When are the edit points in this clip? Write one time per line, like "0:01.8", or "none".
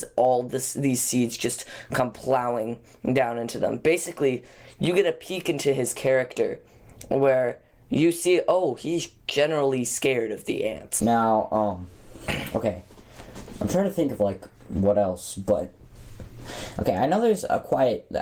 0:11.0